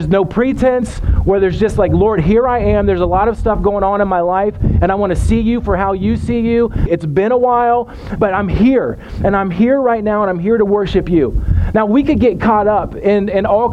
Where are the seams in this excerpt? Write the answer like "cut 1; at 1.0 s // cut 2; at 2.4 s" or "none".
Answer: cut 1; at 6.9 s // cut 2; at 8.2 s